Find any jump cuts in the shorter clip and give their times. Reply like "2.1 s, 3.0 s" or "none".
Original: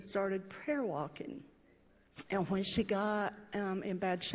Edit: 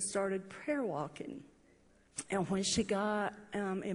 none